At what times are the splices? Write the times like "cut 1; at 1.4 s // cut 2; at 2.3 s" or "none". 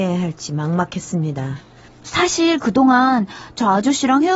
cut 1; at 1.9 s